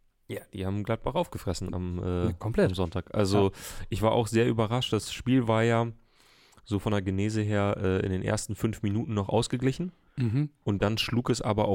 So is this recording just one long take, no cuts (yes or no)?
yes